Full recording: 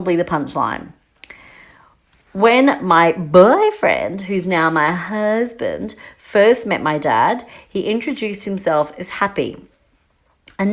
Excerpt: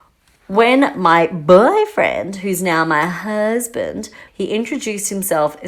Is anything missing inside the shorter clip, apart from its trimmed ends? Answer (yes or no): yes